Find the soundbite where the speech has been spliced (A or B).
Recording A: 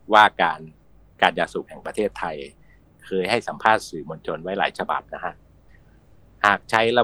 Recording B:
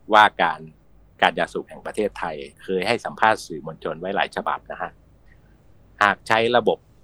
B